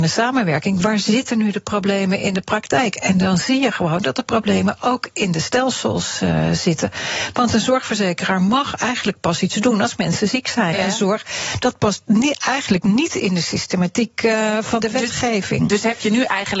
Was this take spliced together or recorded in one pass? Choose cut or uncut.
cut